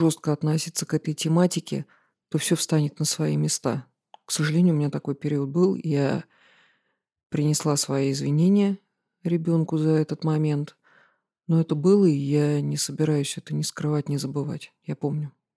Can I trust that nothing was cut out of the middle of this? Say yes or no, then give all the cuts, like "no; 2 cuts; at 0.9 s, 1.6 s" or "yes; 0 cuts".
yes; 0 cuts